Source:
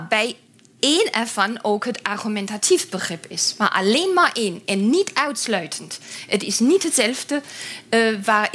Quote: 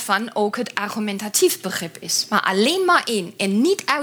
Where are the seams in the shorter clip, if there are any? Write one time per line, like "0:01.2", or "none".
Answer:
none